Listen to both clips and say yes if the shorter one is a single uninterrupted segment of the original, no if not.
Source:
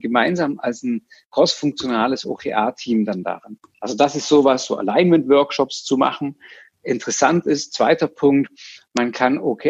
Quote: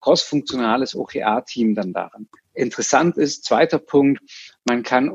no